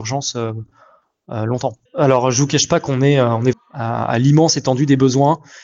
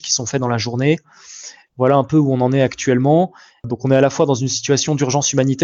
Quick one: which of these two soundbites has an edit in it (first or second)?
first